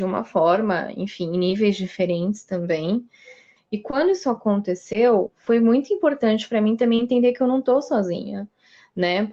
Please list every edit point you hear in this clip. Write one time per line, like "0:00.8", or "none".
0:03.6